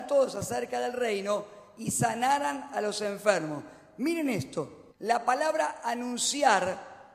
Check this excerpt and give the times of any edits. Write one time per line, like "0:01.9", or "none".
0:04.9